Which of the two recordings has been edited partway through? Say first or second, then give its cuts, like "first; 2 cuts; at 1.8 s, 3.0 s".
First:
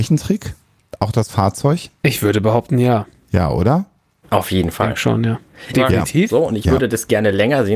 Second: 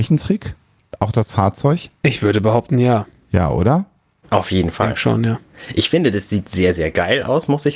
first; 1 cut; at 5.7 s